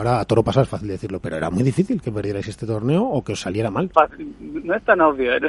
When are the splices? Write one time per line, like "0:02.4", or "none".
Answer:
0:03.9

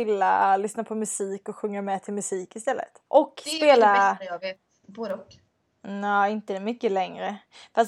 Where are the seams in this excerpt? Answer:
0:03.1
0:04.8

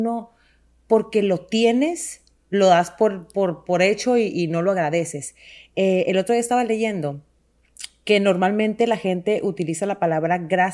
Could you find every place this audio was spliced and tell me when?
none

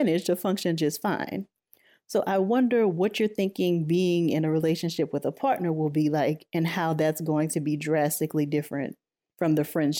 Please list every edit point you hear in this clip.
none

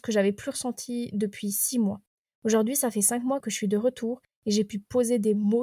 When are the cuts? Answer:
0:03.4

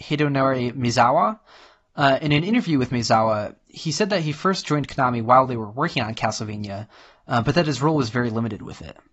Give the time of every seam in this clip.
none

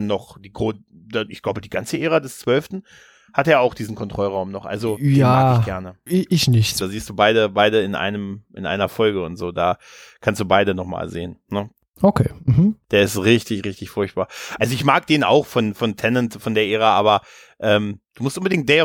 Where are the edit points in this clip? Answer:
0:06.8
0:12.8

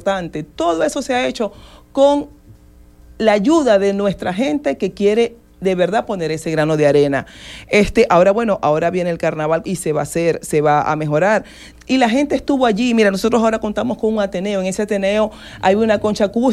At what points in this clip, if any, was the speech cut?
0:09.6
0:11.7

